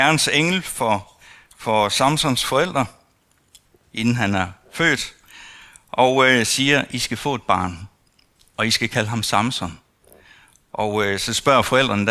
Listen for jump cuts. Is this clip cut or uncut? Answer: uncut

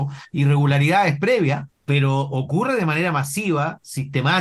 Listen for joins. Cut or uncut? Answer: cut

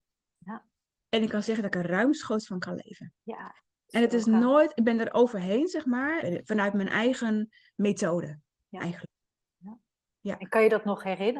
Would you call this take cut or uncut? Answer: cut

